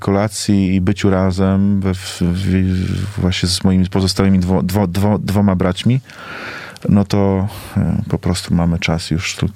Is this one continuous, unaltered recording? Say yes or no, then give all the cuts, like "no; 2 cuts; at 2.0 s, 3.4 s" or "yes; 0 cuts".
yes; 0 cuts